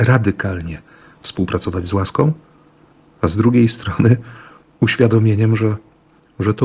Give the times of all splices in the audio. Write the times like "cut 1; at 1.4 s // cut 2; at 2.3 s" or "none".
none